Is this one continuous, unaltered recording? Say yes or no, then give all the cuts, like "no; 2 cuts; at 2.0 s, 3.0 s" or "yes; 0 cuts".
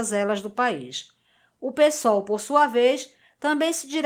yes; 0 cuts